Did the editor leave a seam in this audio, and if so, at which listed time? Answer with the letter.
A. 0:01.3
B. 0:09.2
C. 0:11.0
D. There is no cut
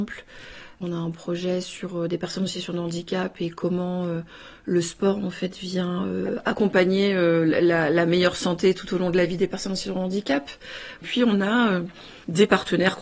D